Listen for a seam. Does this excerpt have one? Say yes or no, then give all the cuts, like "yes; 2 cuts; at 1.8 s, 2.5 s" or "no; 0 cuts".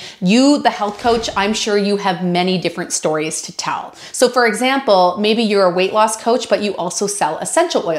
yes; 1 cut; at 4.1 s